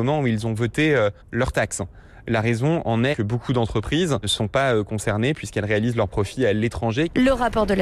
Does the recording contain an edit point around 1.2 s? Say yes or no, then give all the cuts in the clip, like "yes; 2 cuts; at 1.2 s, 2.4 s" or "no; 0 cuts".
yes; 1 cut; at 1.2 s